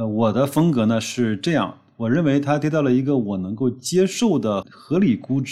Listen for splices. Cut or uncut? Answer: cut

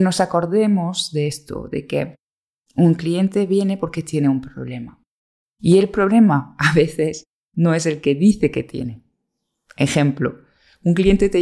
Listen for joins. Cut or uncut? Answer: uncut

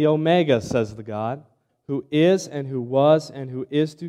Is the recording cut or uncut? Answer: cut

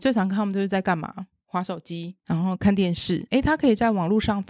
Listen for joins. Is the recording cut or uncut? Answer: cut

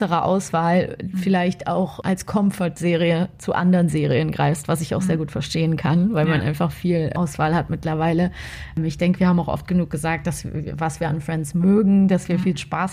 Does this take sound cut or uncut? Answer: uncut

